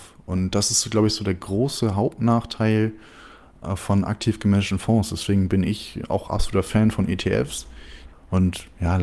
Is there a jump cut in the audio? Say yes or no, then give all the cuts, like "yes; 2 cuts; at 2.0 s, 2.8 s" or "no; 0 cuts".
yes; 1 cut; at 8.1 s